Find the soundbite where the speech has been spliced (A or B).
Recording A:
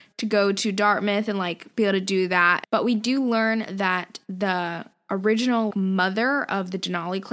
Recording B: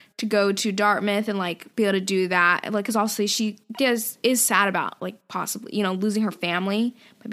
A